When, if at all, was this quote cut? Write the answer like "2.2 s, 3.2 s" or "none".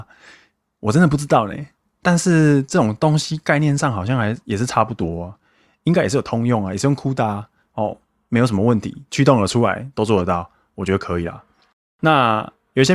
none